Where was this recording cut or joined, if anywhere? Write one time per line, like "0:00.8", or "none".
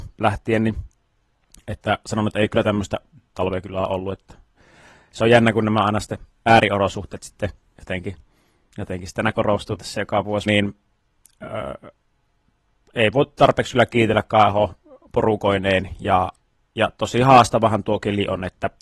0:10.5